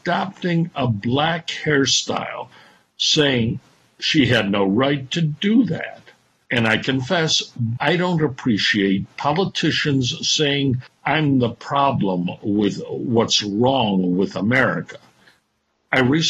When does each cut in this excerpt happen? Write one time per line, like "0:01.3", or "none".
0:06.4
0:07.8